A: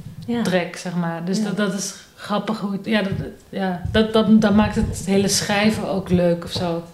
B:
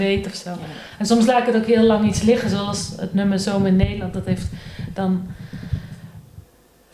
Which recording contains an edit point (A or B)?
A